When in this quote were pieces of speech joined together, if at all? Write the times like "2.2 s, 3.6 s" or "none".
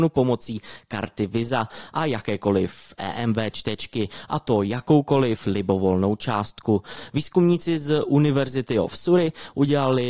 none

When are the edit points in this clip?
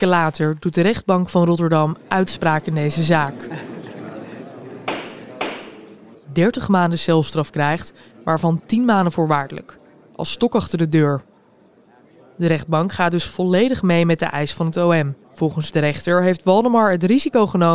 6.1 s, 15.2 s

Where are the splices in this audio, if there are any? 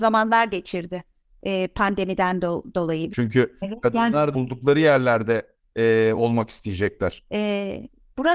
3.1 s, 4.3 s, 7.2 s

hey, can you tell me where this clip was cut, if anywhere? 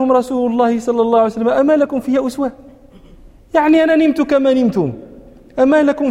none

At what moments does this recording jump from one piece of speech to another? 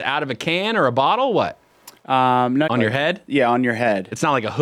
2.7 s

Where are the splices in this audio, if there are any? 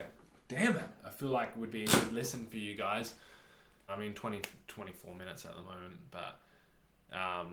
3.9 s

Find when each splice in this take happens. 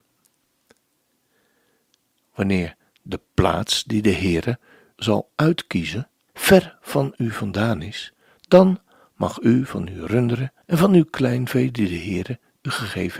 4.9 s, 6.3 s, 10.6 s

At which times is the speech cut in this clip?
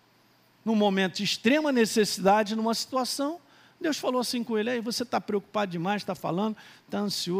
none

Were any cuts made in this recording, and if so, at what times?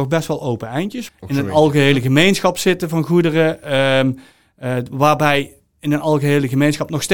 1.1 s

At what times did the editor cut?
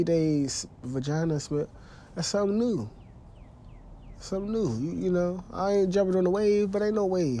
none

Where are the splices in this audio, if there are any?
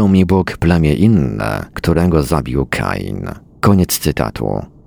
1.7 s

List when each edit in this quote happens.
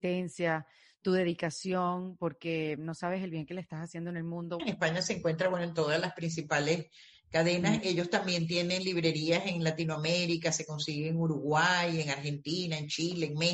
4.6 s

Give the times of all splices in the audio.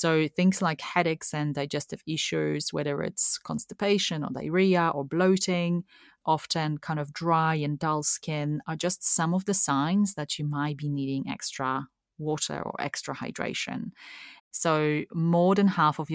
6.2 s, 14.4 s

